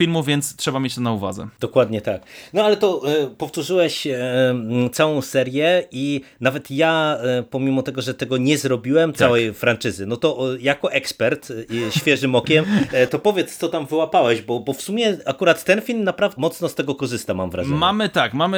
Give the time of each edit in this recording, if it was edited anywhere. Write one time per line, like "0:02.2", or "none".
0:09.1
0:16.4